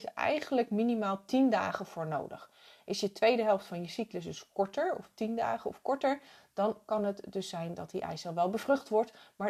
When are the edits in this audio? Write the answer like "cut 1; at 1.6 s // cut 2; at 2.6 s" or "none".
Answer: none